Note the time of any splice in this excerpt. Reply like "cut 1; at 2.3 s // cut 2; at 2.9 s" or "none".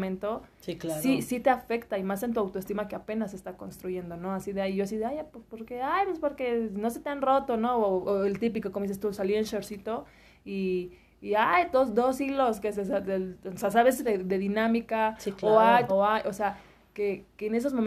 cut 1; at 14.0 s // cut 2; at 15.9 s